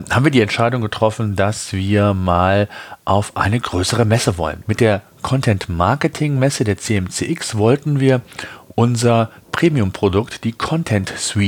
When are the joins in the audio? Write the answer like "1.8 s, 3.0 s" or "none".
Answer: 4.6 s